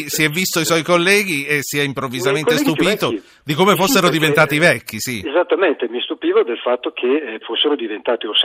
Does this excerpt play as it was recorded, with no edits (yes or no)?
no